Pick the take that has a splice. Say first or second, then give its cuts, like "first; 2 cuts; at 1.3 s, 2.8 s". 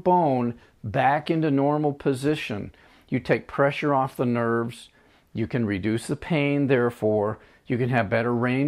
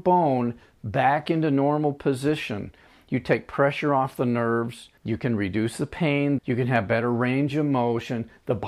second; 2 cuts; at 5.0 s, 6.4 s